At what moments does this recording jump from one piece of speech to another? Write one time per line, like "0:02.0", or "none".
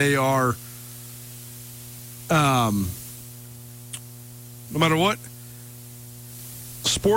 0:04.7